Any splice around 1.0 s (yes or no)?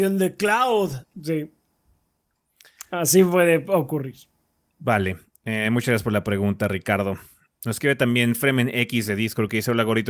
yes